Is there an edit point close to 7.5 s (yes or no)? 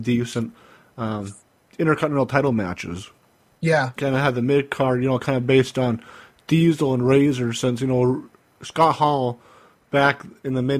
no